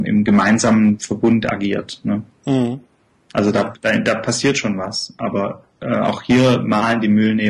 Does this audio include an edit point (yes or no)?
no